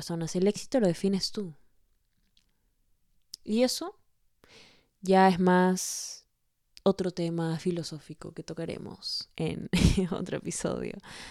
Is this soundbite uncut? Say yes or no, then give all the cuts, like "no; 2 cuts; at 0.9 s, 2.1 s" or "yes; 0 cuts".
yes; 0 cuts